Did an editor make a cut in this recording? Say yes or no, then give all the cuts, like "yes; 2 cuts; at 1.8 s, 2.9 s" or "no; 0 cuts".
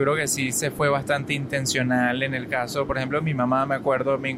no; 0 cuts